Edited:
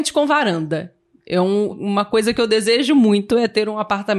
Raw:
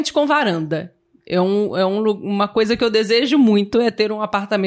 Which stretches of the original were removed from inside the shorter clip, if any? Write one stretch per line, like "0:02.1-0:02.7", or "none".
0:01.7-0:02.1